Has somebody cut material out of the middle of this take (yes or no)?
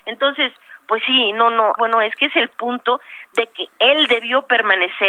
yes